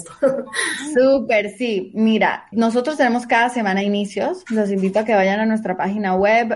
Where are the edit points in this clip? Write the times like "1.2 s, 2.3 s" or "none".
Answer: 2.5 s